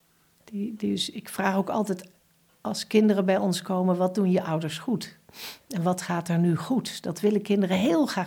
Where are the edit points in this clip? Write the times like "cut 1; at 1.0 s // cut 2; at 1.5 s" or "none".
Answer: none